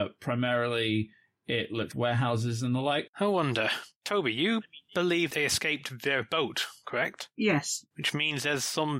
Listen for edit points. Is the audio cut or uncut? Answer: cut